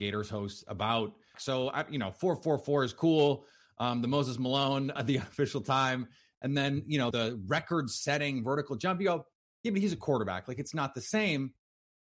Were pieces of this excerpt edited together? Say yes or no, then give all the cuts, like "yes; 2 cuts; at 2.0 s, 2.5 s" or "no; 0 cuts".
yes; 3 cuts; at 1.3 s, 5.0 s, 7.1 s